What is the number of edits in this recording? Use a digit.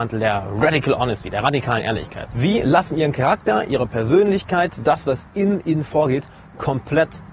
1